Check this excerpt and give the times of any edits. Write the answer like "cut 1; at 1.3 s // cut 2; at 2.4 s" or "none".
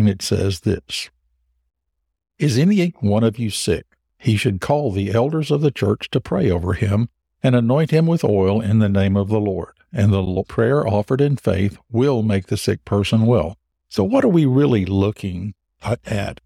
cut 1; at 13.8 s